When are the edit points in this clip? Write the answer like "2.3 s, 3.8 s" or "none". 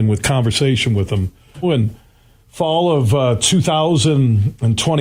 1.6 s